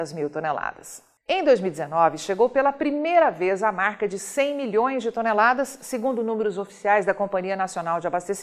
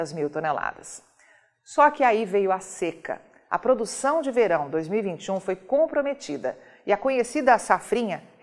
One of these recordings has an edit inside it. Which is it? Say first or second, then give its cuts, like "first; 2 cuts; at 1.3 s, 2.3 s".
first; 1 cut; at 1.2 s